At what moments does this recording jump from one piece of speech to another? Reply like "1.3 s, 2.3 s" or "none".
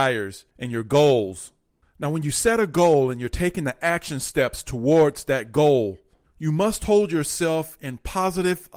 none